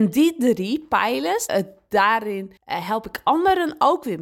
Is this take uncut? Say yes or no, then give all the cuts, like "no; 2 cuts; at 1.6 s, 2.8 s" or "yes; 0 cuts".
no; 2 cuts; at 1.5 s, 2.6 s